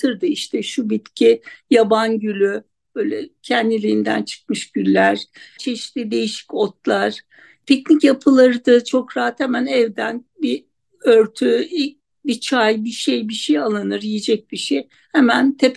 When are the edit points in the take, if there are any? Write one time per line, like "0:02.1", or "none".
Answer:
0:05.6